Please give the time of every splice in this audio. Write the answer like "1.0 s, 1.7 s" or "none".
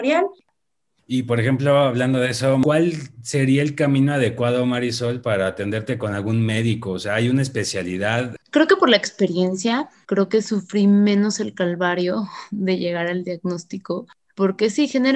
8.4 s, 10.0 s